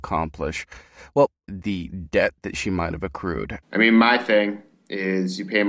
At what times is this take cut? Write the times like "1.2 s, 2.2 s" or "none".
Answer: 1.5 s, 3.6 s